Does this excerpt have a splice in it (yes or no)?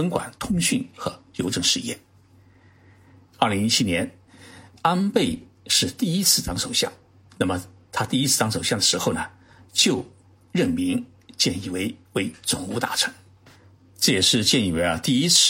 no